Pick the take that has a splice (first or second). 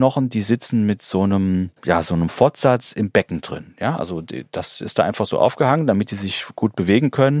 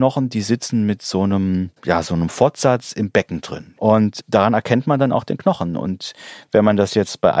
second